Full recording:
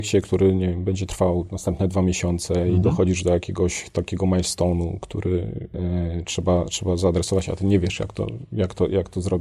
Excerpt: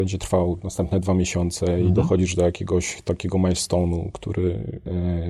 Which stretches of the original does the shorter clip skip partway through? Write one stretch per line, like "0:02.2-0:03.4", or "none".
none